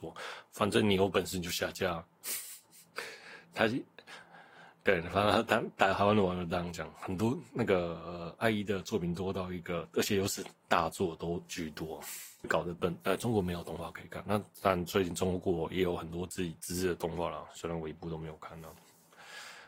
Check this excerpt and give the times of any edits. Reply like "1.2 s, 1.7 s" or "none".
none